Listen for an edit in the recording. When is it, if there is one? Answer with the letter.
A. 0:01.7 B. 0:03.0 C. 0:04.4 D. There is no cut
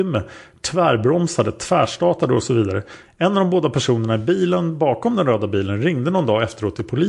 B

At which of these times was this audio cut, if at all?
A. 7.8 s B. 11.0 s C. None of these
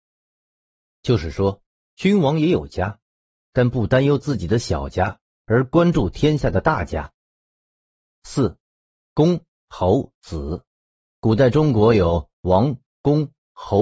B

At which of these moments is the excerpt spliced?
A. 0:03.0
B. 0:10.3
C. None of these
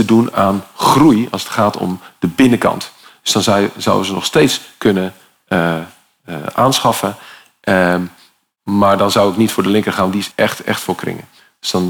B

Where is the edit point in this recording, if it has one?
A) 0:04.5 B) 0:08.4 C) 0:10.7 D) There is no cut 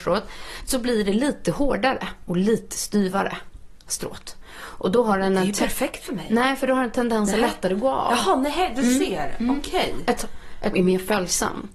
C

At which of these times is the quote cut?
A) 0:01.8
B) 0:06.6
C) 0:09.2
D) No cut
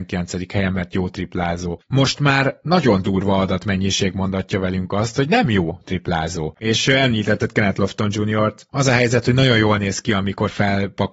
B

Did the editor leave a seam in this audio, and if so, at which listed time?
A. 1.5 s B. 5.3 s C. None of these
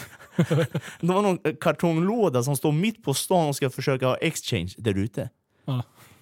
C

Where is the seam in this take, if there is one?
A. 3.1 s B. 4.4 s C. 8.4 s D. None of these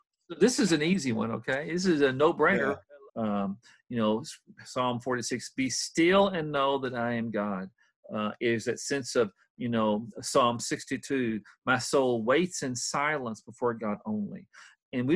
A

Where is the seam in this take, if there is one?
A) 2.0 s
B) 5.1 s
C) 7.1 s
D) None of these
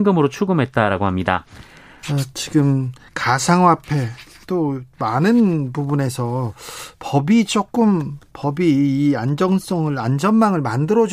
A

